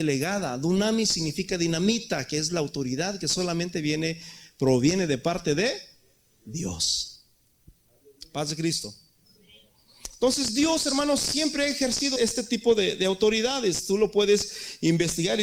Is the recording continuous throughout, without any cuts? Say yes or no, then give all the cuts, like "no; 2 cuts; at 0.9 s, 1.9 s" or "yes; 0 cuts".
no; 1 cut; at 12.2 s